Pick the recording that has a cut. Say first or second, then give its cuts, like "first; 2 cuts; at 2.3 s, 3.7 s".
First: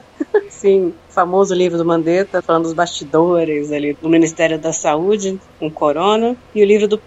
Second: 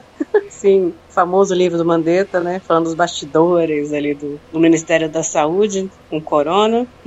first; 2 cuts; at 2.4 s, 3.9 s